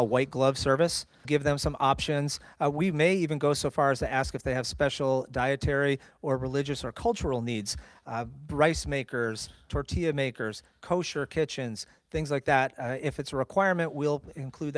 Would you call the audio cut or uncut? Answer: cut